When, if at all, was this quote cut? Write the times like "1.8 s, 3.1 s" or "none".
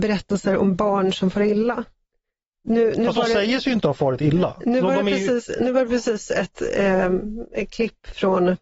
none